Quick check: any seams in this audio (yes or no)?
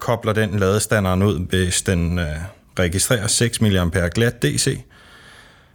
no